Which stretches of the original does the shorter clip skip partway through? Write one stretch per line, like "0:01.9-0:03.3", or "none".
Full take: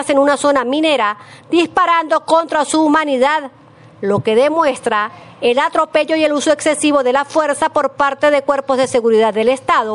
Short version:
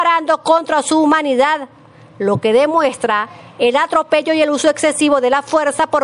none